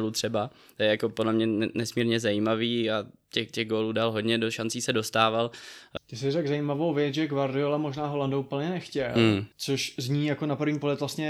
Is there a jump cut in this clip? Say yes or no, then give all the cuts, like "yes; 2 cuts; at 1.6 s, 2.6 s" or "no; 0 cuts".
yes; 2 cuts; at 6.0 s, 9.5 s